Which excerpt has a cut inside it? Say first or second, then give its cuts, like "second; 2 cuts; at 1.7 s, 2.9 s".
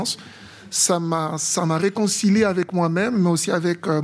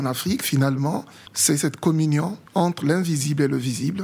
second; 2 cuts; at 1.3 s, 2.5 s